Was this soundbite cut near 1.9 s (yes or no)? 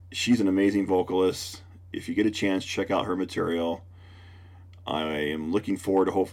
no